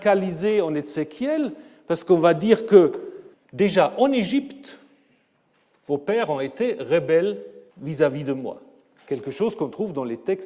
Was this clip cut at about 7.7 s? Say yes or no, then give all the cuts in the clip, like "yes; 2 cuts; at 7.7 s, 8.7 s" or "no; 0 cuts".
yes; 2 cuts; at 3.3 s, 7.7 s